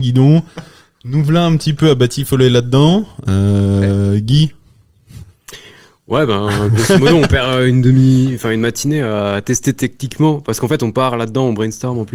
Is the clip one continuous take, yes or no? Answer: yes